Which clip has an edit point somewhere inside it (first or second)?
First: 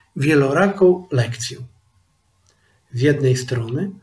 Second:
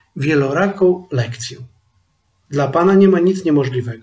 second